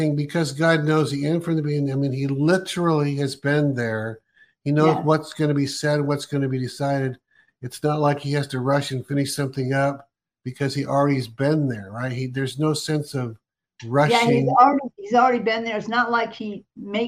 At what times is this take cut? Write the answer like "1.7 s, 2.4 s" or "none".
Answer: none

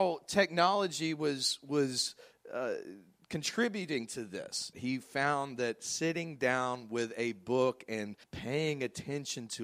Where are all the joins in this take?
4.7 s, 8.2 s

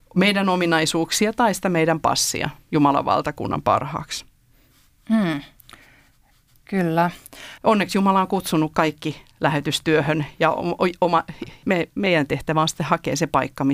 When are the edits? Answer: 7.6 s, 11.6 s

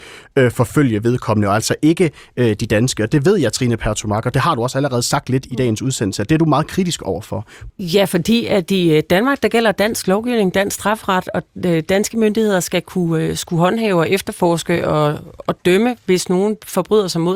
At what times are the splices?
7.7 s

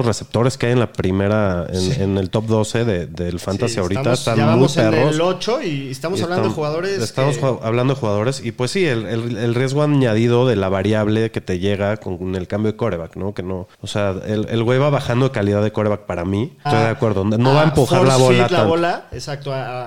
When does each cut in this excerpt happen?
13.7 s, 16.7 s

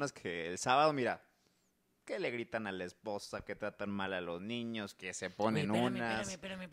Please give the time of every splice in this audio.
none

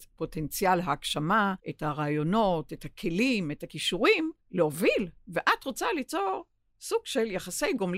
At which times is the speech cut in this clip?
1.6 s, 4.4 s

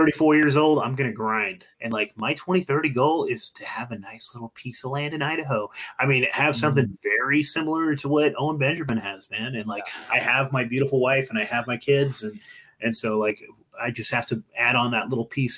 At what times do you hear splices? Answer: 1.7 s

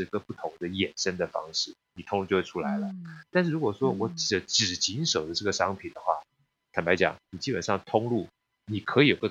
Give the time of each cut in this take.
none

